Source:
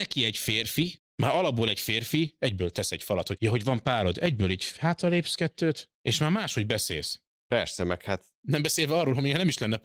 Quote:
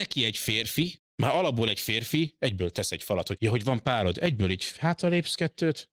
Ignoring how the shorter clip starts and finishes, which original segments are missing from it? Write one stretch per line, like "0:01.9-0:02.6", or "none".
none